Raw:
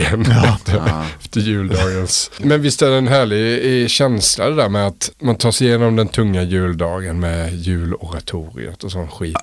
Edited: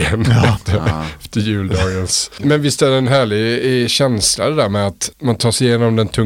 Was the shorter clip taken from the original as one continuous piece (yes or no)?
yes